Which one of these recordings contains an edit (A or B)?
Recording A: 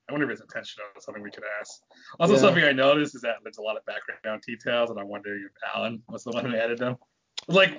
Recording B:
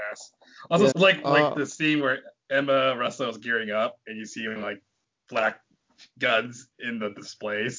B